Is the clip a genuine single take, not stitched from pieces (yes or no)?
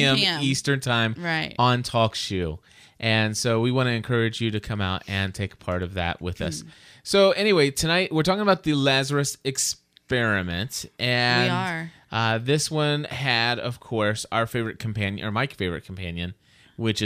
yes